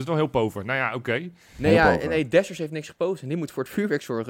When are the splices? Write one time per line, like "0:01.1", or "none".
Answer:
none